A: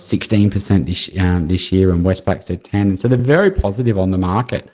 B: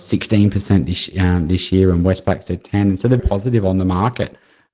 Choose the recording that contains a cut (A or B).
B